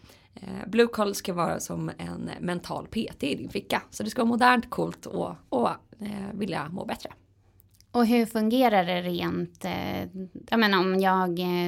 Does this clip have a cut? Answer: no; 0 cuts

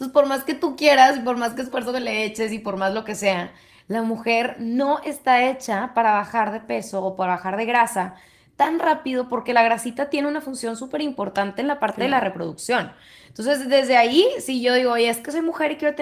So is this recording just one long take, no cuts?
yes; 0 cuts

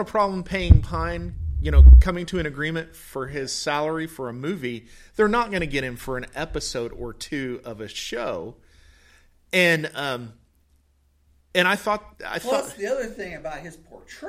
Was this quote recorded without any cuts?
yes; 0 cuts

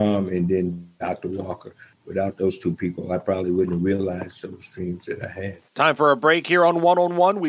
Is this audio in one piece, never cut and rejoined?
yes; 0 cuts

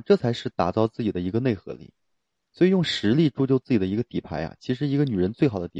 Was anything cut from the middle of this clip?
no; 0 cuts

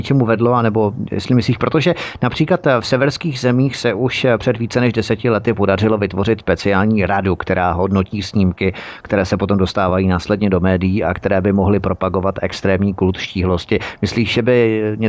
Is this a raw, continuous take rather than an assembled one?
yes; 0 cuts

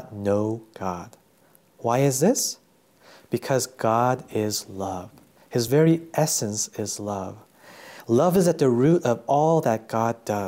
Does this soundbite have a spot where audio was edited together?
no; 0 cuts

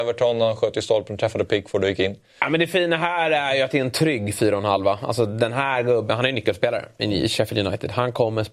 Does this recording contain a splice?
no; 0 cuts

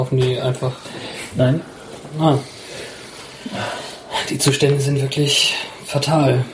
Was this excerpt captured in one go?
yes; 0 cuts

